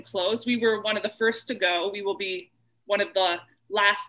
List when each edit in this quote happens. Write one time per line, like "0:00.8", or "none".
none